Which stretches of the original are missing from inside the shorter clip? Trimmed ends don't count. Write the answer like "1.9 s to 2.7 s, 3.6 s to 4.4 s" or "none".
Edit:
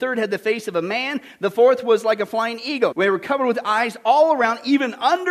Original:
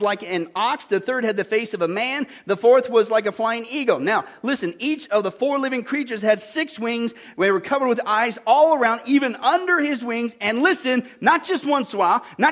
4.0 s to 7.3 s